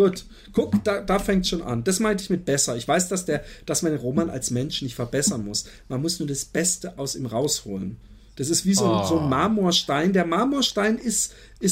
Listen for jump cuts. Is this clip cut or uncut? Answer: uncut